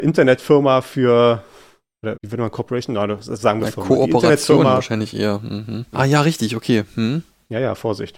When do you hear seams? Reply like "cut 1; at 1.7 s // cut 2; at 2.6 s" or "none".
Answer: cut 1; at 2.1 s // cut 2; at 5.9 s